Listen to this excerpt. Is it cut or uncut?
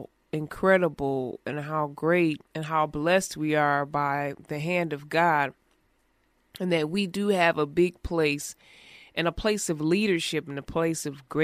cut